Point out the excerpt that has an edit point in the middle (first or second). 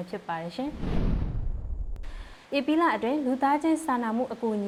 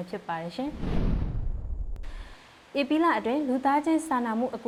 first